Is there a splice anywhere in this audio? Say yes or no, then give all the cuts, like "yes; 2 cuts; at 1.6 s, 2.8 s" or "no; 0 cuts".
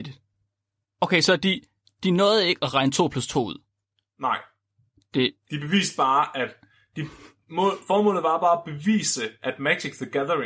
no; 0 cuts